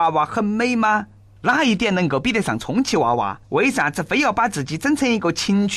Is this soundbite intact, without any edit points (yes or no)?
no